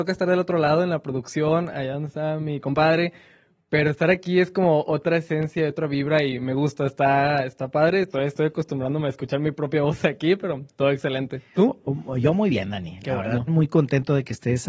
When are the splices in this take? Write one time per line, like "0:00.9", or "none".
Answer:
0:13.5